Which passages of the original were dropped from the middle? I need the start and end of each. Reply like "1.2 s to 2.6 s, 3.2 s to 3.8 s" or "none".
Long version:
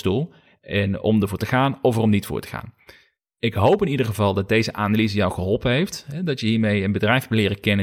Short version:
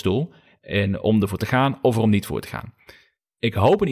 none